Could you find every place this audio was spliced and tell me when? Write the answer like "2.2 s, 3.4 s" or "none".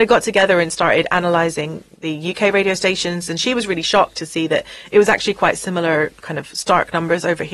none